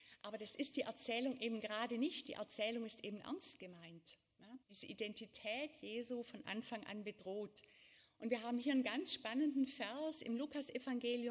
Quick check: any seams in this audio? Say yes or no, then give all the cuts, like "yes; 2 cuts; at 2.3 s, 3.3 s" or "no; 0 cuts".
yes; 1 cut; at 4.6 s